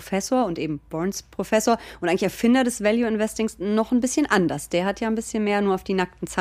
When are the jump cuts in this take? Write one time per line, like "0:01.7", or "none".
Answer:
none